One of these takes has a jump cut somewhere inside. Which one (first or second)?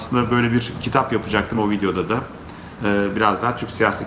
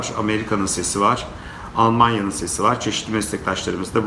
first